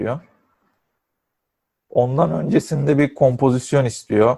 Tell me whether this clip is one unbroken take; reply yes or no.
yes